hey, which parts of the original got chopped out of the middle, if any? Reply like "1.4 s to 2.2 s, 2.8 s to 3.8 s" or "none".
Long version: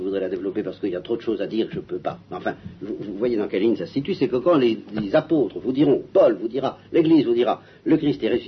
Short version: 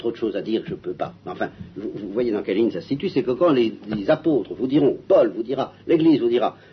none